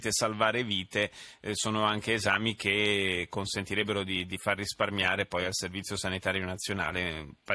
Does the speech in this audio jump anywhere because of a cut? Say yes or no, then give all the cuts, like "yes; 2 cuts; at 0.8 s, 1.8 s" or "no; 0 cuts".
no; 0 cuts